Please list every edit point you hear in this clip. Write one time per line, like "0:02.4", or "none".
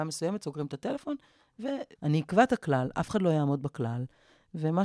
0:02.0